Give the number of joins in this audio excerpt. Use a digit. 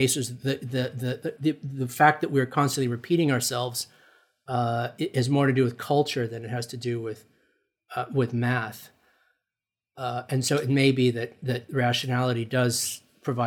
1